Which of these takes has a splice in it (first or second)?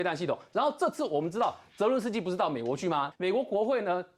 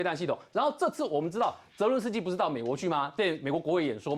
first